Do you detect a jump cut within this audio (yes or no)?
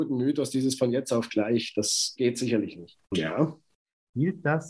yes